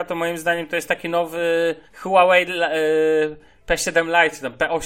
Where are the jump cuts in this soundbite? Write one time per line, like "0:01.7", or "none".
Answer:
0:01.8